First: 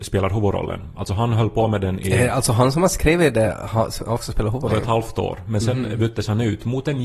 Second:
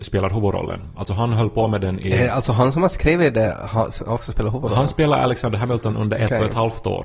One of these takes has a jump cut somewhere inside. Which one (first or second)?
first